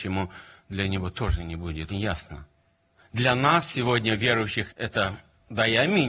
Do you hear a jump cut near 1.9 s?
yes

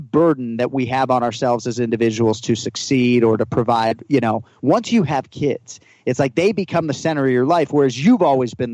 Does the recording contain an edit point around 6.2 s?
no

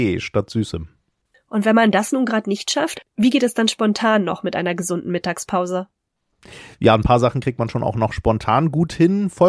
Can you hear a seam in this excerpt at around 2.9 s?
yes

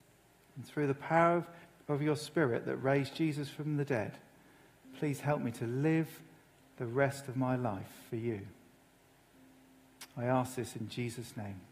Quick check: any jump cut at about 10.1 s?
no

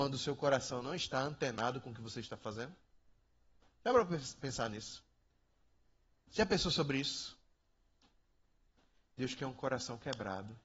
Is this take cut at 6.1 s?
yes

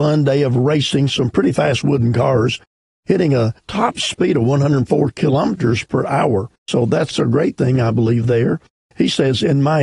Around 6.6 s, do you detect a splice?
yes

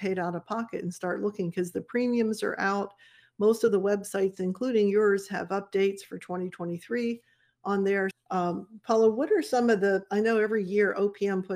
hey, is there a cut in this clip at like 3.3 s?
no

